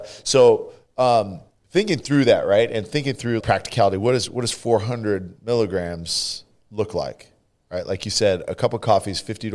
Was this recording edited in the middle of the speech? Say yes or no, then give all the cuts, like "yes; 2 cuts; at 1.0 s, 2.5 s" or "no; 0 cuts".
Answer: yes; 1 cut; at 3.4 s